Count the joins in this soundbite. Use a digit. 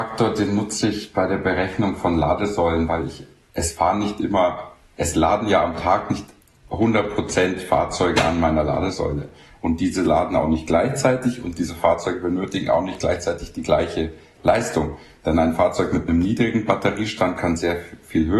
0